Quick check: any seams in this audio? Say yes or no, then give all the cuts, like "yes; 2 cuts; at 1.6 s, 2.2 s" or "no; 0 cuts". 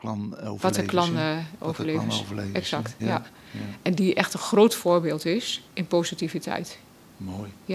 yes; 2 cuts; at 3.0 s, 5.7 s